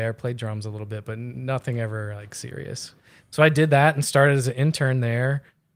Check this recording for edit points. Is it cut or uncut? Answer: cut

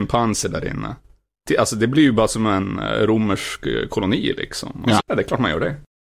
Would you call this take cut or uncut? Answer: cut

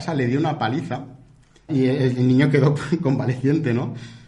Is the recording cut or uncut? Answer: cut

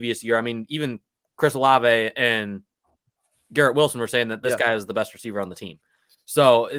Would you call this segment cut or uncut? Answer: uncut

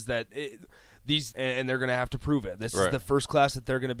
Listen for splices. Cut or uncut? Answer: cut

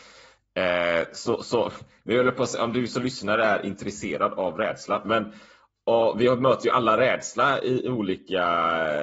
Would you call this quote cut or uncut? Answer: cut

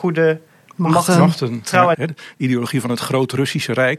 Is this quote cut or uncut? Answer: cut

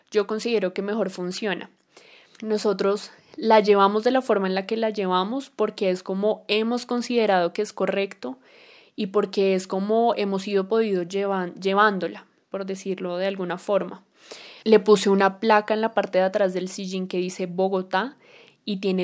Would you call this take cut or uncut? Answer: cut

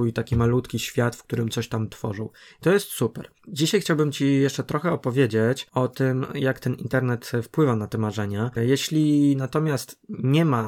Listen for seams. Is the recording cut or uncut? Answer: cut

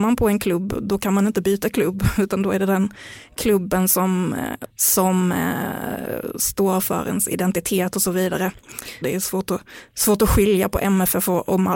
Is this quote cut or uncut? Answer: cut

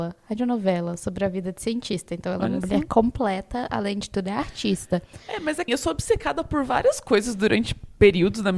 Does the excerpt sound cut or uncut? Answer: cut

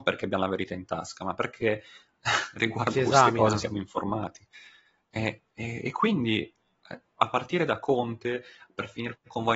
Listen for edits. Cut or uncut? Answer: uncut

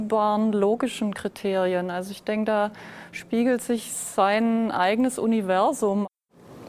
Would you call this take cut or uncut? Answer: uncut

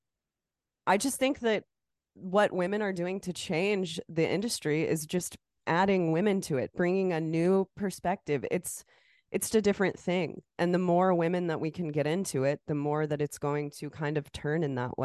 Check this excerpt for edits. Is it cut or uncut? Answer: cut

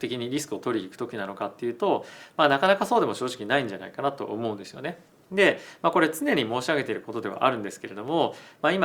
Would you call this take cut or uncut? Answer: uncut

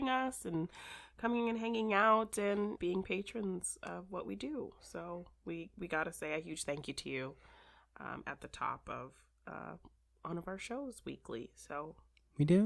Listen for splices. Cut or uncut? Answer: cut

